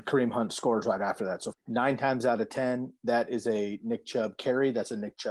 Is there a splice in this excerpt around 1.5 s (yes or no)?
yes